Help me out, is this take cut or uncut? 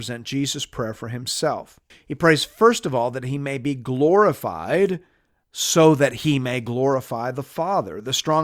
cut